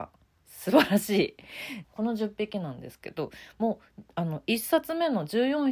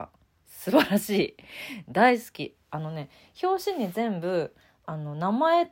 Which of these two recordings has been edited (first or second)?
first